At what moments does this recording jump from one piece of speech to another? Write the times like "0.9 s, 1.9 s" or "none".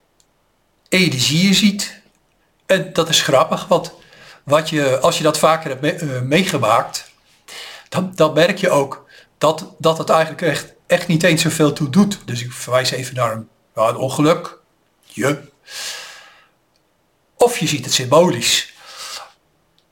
12.3 s